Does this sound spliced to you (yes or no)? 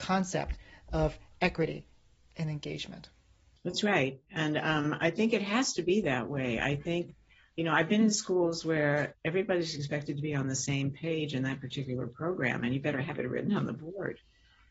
yes